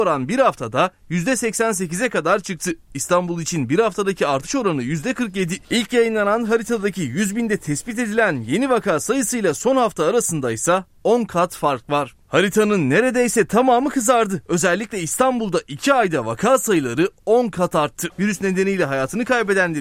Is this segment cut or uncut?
cut